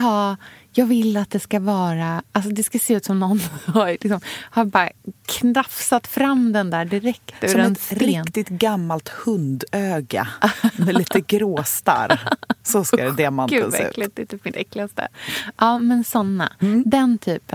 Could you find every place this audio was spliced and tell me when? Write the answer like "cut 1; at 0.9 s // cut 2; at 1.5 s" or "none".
none